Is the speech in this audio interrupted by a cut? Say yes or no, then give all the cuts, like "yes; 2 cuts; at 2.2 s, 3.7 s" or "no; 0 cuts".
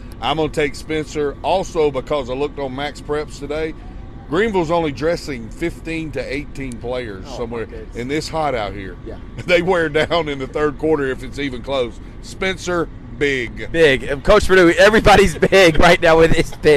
no; 0 cuts